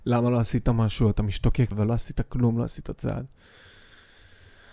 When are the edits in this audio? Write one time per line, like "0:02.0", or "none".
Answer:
0:01.7